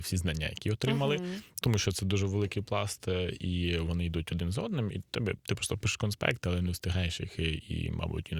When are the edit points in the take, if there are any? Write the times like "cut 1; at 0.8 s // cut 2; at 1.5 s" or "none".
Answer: none